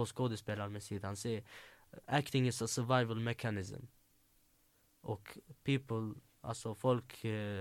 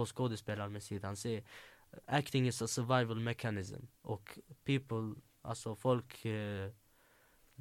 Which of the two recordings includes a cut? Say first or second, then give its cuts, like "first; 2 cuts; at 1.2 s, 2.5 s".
second; 1 cut; at 4.0 s